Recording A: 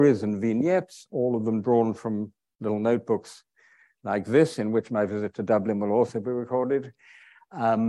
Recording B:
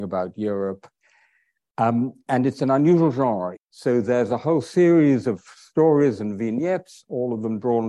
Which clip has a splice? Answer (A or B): B